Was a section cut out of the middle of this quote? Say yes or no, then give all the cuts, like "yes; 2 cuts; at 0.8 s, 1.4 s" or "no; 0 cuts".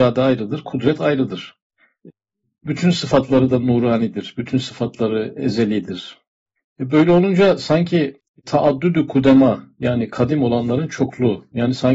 no; 0 cuts